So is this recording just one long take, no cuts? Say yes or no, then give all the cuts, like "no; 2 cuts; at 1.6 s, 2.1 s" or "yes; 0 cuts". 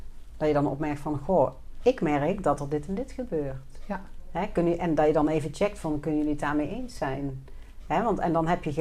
yes; 0 cuts